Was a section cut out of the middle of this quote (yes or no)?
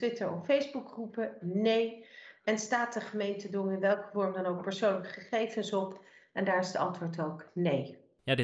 no